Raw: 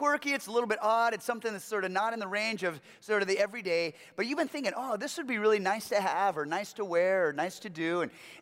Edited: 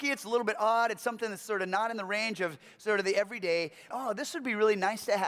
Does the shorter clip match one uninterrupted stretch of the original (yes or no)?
no